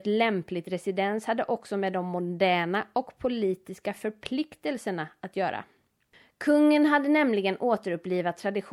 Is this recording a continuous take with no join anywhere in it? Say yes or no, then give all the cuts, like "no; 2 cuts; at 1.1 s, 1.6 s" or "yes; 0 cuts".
yes; 0 cuts